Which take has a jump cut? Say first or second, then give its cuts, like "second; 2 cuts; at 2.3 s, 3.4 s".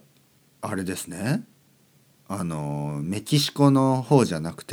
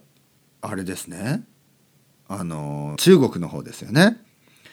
second; 1 cut; at 3.0 s